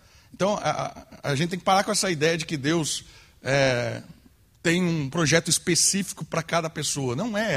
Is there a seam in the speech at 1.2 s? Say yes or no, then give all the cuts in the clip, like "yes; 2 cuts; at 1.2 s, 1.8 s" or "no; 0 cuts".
no; 0 cuts